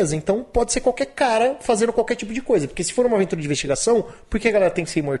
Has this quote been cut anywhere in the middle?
no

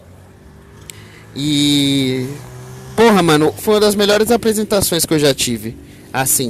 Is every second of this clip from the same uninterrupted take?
no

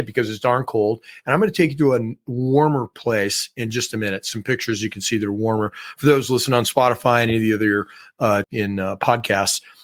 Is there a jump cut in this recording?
yes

